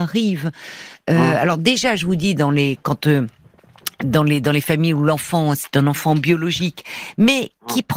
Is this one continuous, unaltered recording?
yes; 0 cuts

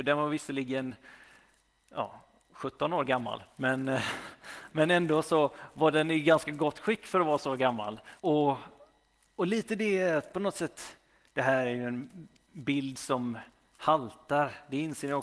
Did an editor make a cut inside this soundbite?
yes; 1 cut; at 8.2 s

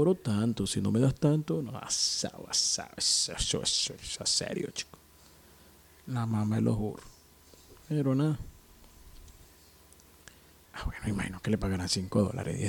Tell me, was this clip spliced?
yes; 1 cut; at 10.6 s

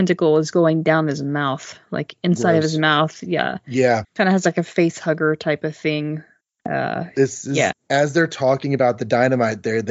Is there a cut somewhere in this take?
yes; 2 cuts; at 4.0 s, 7.7 s

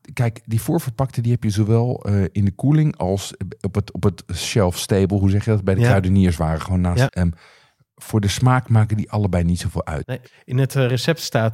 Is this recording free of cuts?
no; 2 cuts; at 7.1 s, 10.0 s

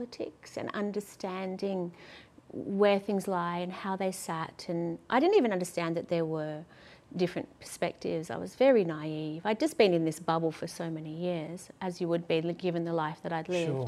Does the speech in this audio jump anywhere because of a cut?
no; 0 cuts

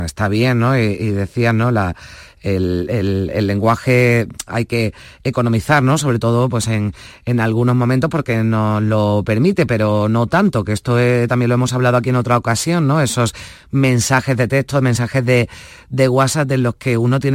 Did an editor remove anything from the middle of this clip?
no; 0 cuts

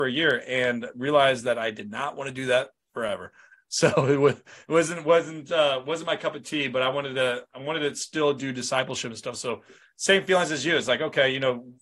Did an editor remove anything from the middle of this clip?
no; 0 cuts

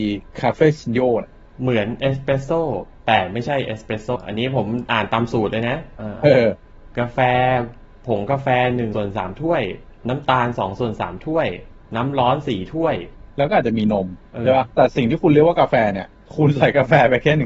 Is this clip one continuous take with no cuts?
no; 1 cut; at 14.7 s

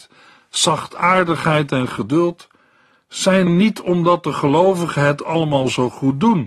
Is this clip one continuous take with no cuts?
no; 1 cut; at 3.5 s

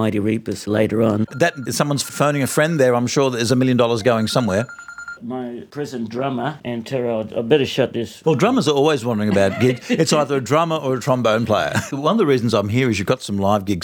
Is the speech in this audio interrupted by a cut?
yes; 2 cuts; at 5.2 s, 8.2 s

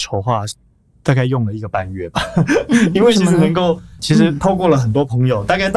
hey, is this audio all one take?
no; 1 cut; at 4.0 s

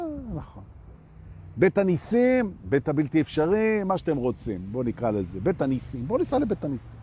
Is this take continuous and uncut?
yes; 0 cuts

